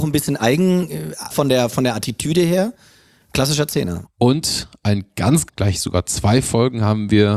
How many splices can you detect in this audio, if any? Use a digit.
3